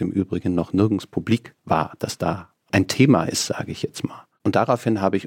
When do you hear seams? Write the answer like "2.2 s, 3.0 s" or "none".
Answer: 1.6 s

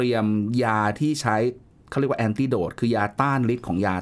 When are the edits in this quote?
none

